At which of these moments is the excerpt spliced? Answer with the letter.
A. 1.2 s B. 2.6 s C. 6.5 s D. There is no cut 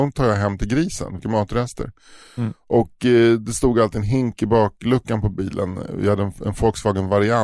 A